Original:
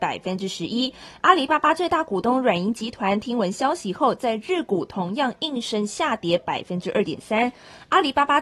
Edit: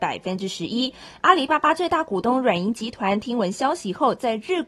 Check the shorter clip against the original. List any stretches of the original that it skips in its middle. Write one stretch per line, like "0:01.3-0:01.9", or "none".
none